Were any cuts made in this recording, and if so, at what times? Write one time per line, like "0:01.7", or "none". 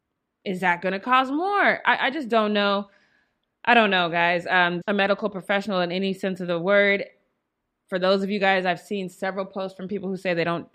0:04.8